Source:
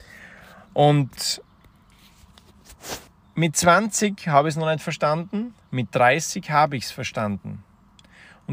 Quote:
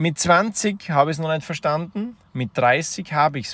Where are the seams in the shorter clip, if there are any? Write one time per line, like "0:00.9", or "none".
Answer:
none